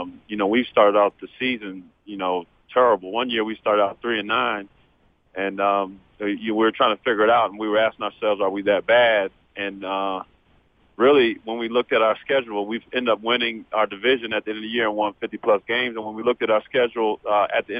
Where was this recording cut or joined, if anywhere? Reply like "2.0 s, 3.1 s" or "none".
none